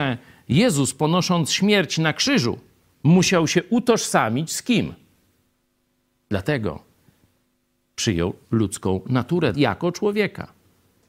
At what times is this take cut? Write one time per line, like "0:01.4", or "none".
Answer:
0:06.2
0:08.4
0:09.5